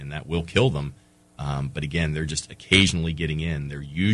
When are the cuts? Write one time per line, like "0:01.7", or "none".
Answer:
none